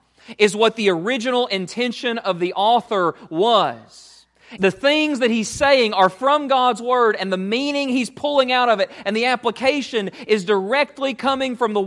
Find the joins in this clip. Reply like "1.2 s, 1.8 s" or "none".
4.6 s